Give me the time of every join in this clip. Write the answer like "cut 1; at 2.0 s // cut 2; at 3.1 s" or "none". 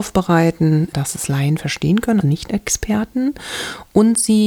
cut 1; at 2.2 s